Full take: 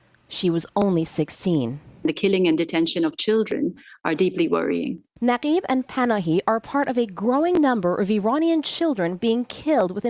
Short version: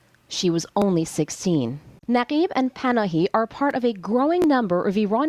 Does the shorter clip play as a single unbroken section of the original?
no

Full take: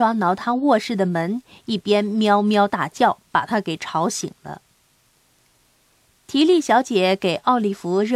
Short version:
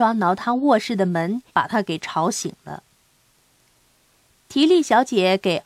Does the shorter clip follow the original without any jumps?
no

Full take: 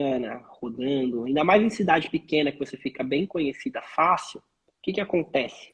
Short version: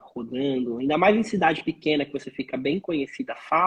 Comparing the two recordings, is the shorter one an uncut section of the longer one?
yes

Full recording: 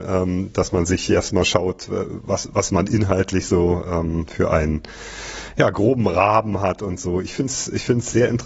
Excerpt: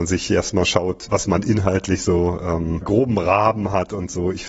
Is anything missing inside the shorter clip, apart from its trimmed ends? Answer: yes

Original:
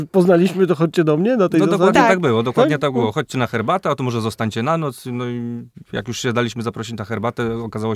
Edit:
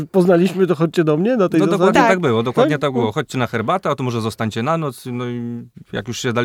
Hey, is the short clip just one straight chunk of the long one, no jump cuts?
yes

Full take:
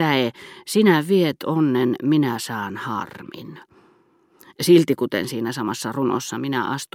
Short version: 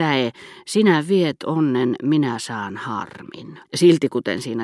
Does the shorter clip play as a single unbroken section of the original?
no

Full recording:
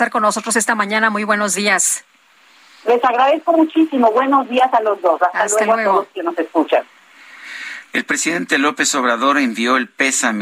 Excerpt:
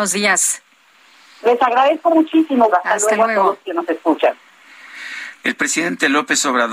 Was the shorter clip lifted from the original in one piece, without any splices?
no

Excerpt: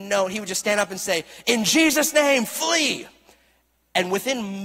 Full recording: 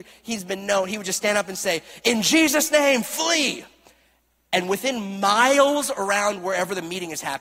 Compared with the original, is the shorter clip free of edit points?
yes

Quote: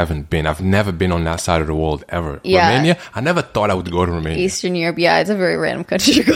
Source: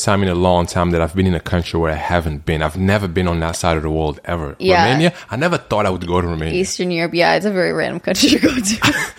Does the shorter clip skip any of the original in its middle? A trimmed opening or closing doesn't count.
no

